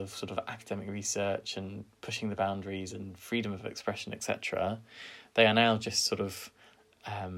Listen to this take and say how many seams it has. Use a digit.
0